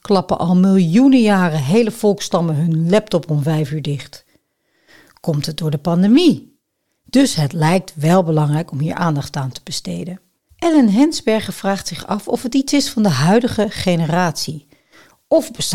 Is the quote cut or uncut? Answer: cut